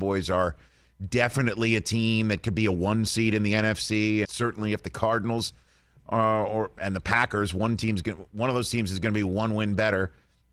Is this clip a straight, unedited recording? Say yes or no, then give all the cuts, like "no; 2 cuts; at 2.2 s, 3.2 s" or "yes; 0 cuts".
no; 1 cut; at 4.2 s